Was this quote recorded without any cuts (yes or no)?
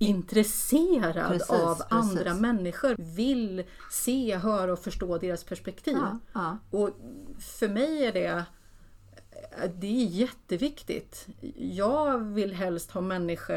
no